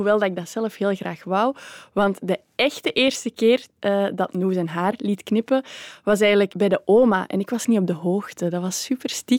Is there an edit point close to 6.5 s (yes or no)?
yes